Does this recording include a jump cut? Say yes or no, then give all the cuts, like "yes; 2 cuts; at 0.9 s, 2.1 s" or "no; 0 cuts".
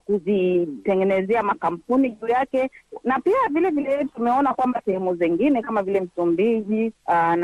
no; 0 cuts